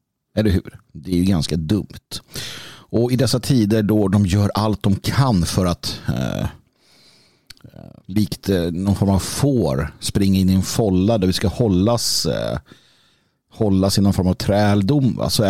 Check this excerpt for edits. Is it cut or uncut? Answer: cut